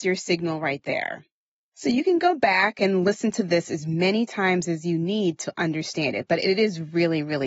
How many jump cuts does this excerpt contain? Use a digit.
1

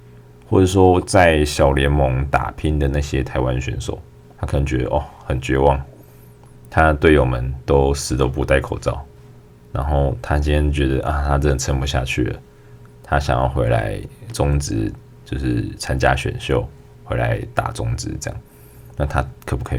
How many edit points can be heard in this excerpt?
1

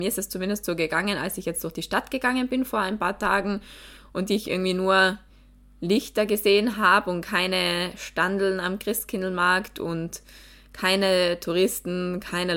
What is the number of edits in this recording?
0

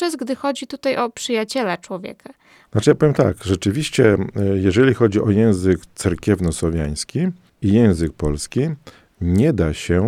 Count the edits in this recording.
1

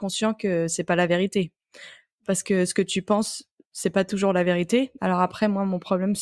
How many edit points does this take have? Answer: 1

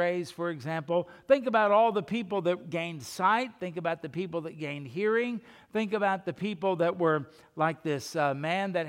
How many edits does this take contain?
0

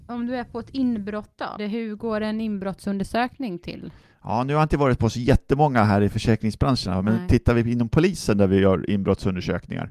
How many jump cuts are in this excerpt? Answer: 1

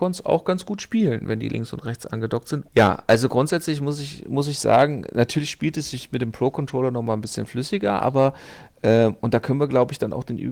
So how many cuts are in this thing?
1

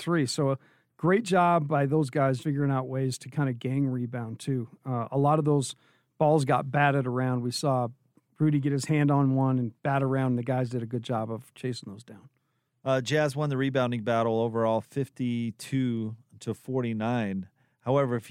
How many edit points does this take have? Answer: 2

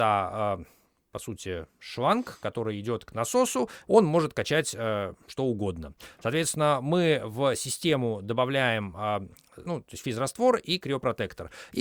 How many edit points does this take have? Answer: 2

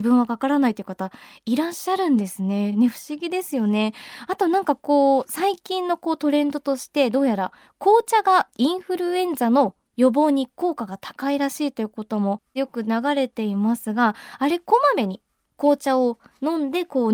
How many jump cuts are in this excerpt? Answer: 0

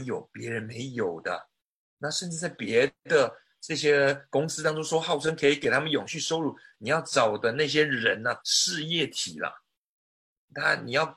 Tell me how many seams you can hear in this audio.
2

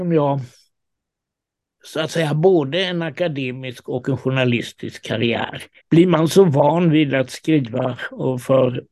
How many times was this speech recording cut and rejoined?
1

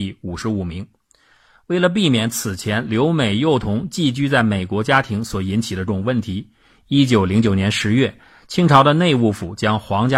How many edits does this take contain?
1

